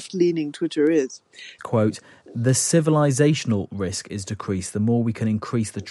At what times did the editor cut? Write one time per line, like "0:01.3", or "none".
0:01.6